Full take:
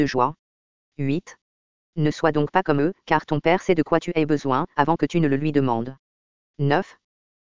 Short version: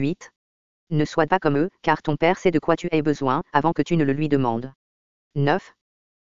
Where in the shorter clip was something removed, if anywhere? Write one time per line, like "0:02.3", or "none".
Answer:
0:01.3